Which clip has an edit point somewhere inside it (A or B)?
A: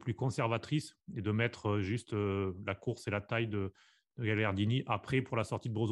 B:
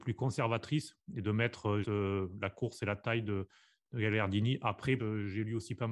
B